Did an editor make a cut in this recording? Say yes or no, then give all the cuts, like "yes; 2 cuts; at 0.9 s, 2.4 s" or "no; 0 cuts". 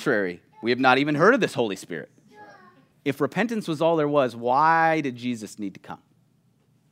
yes; 1 cut; at 2.9 s